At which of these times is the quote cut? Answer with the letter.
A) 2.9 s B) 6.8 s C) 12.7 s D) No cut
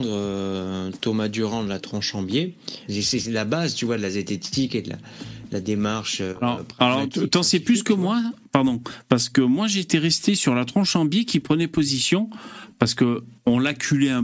A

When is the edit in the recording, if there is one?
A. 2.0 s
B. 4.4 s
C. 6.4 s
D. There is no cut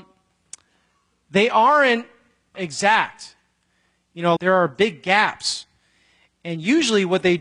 B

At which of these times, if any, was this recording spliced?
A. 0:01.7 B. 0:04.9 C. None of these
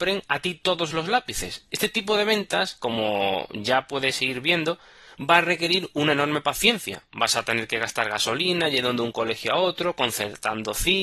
C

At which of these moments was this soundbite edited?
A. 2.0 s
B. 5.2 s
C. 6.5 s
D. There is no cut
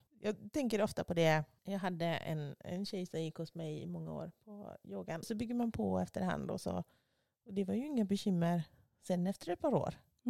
B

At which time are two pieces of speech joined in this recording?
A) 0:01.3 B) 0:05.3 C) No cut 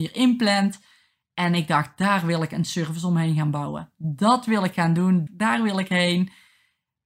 B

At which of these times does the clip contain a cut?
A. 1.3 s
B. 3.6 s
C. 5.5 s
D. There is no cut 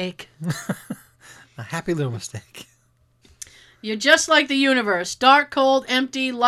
D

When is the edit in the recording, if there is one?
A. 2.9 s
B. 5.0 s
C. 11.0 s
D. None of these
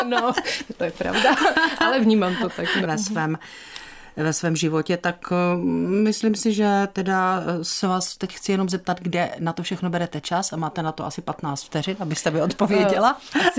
A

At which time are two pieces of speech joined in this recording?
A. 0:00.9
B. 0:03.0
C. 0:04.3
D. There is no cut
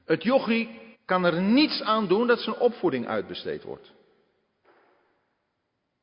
A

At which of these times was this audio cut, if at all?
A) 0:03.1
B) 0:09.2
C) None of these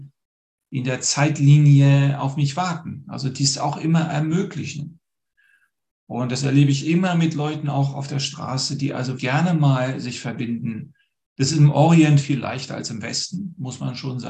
B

